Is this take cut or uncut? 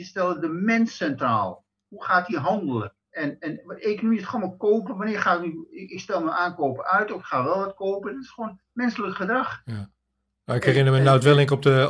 cut